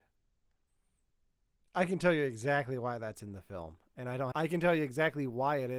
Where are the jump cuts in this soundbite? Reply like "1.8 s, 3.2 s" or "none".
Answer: 4.3 s